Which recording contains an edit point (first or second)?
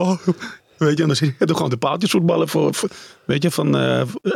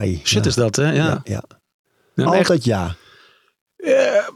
second